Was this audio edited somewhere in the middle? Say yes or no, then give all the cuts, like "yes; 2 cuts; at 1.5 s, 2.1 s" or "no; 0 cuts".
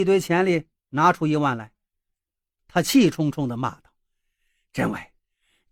yes; 1 cut; at 2.6 s